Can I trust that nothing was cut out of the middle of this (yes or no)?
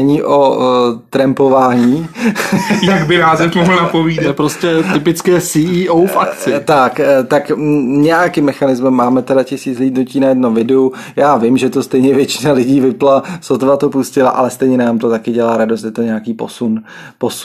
yes